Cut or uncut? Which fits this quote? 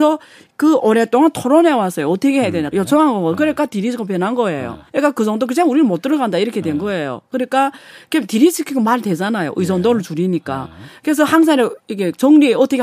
cut